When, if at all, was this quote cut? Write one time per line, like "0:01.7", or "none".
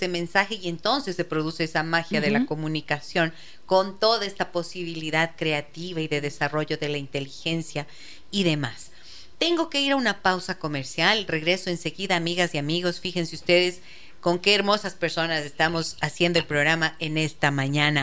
none